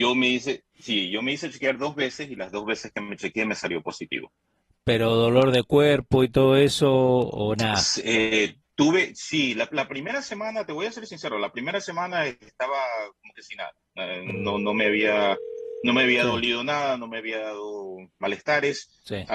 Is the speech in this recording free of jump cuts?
yes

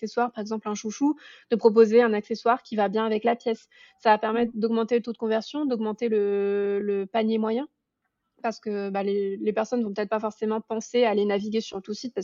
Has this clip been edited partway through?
no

